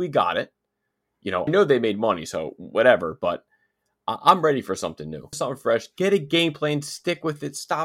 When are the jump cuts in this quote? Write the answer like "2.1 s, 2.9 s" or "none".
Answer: 1.5 s, 5.3 s